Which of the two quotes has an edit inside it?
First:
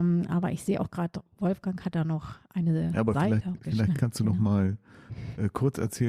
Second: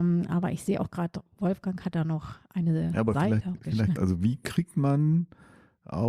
second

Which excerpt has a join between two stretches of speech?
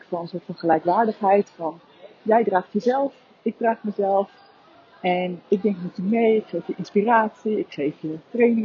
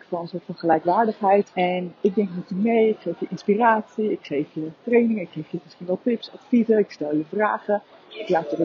second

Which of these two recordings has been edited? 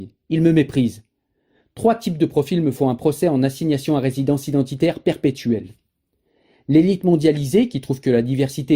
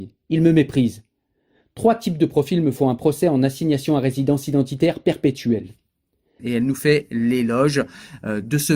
second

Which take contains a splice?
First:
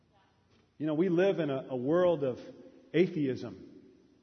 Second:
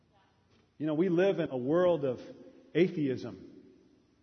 second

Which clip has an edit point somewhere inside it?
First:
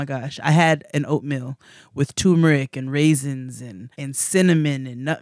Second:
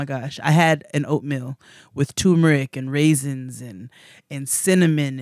first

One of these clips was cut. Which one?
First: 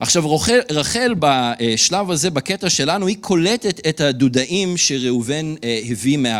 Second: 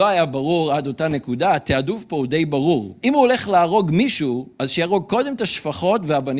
second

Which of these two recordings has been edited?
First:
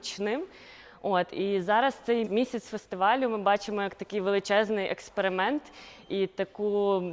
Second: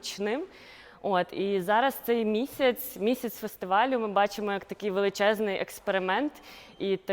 first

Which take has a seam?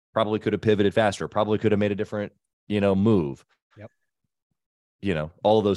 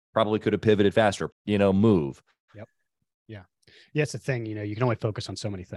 second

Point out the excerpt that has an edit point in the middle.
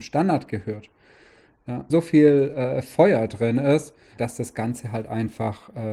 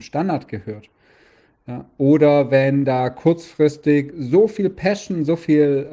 first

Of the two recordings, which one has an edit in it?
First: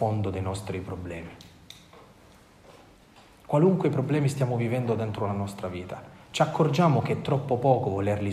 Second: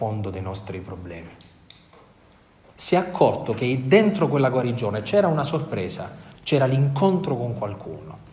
second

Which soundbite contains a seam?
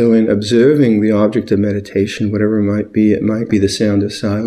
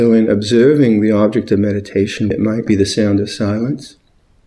second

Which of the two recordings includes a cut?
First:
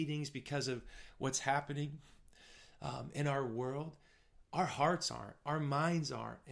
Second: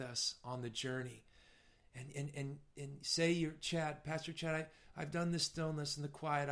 second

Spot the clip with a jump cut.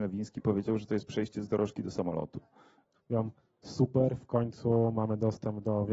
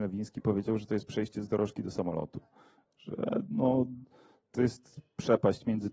first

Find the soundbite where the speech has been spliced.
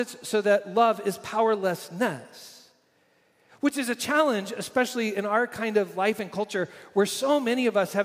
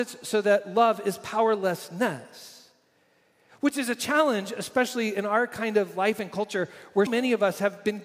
second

